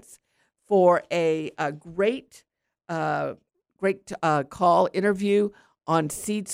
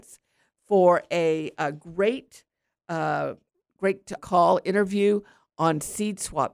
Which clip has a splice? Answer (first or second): second